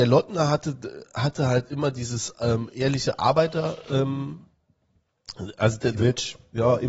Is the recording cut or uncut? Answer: uncut